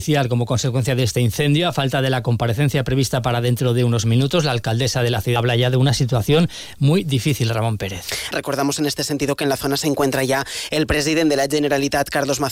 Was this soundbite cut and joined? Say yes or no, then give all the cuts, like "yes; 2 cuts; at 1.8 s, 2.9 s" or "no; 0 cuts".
yes; 2 cuts; at 5.4 s, 8.3 s